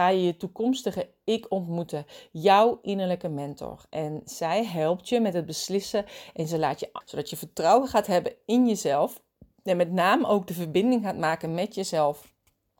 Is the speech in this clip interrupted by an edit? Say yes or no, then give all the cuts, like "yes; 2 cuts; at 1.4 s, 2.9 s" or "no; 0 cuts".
yes; 1 cut; at 7.0 s